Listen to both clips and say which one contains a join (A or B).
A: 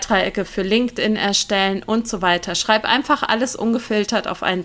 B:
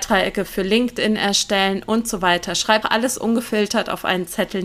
B